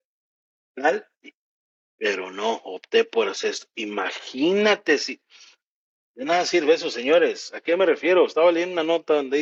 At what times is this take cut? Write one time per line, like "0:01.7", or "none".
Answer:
0:01.8